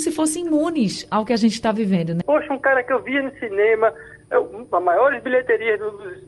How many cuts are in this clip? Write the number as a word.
one